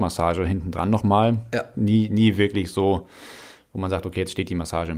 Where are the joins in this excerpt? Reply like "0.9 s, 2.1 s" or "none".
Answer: 1.7 s

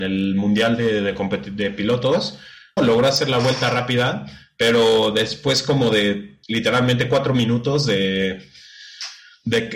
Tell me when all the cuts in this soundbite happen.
2.8 s, 6.4 s

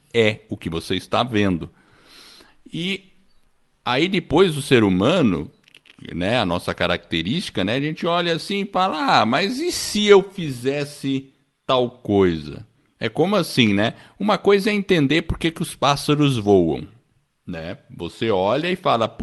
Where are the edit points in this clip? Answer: none

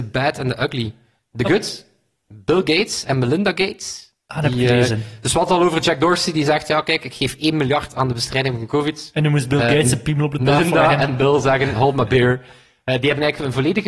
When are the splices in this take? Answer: none

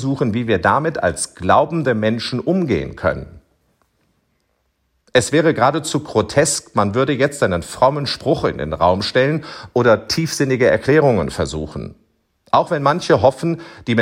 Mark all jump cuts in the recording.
5.0 s, 12.4 s

